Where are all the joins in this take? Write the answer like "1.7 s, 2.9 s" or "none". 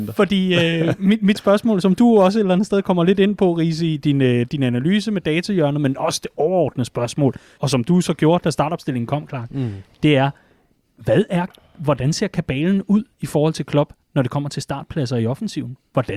7.6 s

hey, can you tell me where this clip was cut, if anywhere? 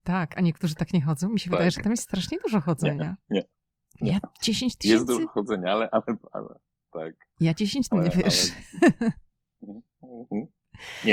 7.9 s

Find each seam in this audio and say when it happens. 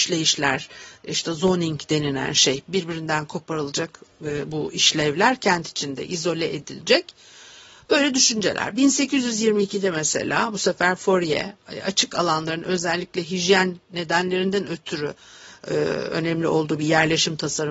none

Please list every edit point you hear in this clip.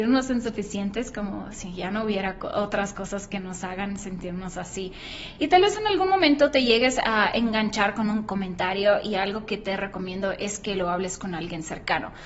none

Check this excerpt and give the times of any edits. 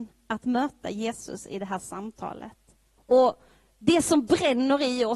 3.0 s

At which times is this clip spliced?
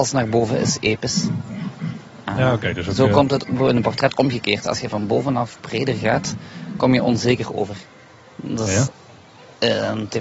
none

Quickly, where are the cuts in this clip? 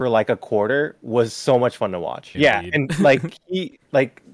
2.3 s

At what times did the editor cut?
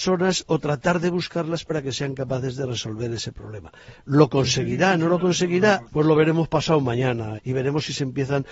5.9 s, 7.4 s

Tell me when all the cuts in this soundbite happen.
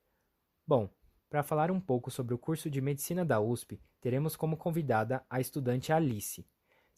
none

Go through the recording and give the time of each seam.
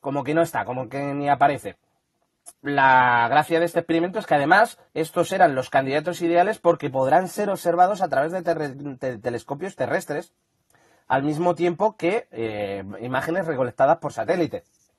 2.5 s, 4.9 s

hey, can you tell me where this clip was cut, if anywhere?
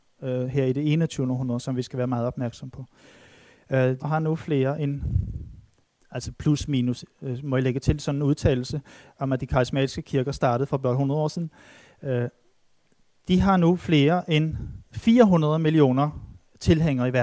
4.0 s

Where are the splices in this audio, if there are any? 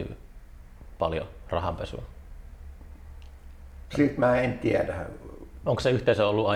3.9 s, 5.6 s

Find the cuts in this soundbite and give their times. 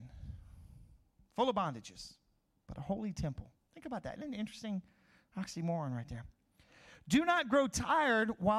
none

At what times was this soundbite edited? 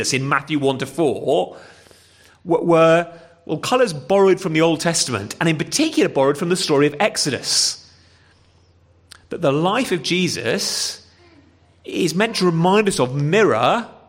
none

